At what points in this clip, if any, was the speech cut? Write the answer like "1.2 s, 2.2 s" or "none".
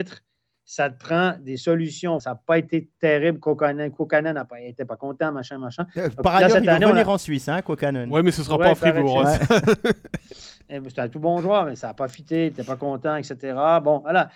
2.2 s